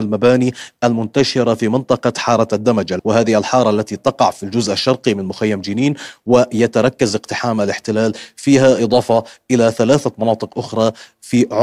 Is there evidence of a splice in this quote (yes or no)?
no